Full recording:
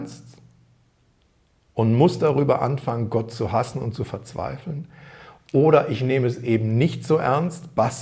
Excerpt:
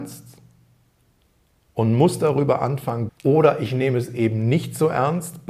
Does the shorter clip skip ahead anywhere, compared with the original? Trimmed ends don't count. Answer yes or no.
yes